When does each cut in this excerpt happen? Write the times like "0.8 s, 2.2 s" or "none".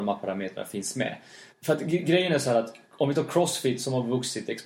1.5 s, 2.8 s